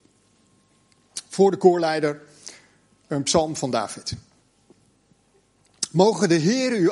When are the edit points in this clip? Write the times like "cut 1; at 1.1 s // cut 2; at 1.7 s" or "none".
none

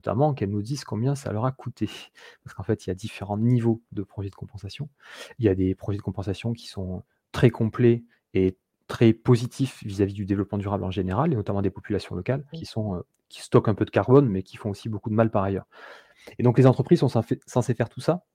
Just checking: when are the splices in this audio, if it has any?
cut 1; at 12.5 s

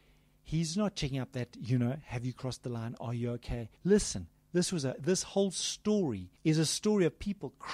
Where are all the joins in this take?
cut 1; at 3.8 s // cut 2; at 6.4 s

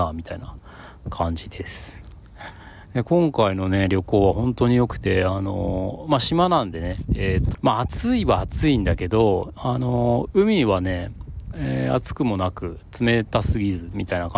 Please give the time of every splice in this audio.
cut 1; at 7.5 s // cut 2; at 11.5 s

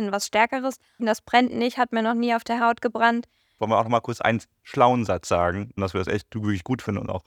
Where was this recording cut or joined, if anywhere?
cut 1; at 1.0 s // cut 2; at 3.6 s // cut 3; at 5.8 s

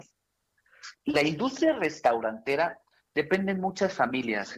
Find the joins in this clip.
cut 1; at 0.9 s

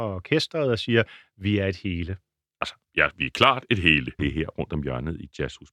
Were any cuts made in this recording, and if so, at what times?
cut 1; at 4.2 s

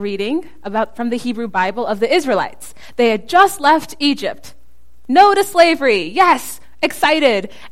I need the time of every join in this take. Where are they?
none

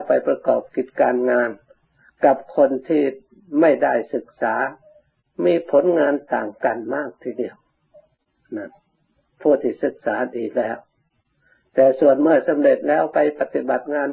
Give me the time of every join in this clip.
none

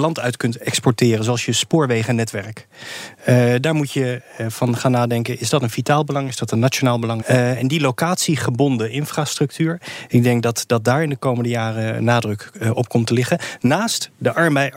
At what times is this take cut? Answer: cut 1; at 7.2 s

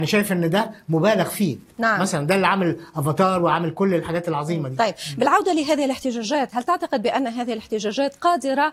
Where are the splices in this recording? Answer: none

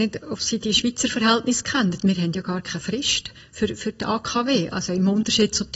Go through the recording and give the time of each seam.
none

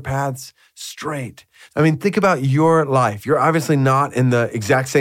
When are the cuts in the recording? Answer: none

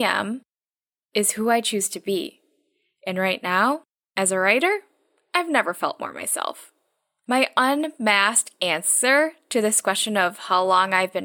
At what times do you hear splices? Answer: none

